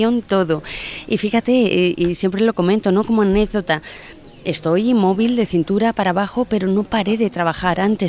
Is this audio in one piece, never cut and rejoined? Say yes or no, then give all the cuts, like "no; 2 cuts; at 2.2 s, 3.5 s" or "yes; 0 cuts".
yes; 0 cuts